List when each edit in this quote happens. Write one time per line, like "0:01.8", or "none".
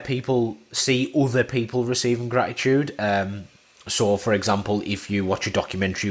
none